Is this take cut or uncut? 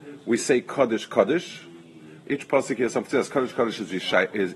cut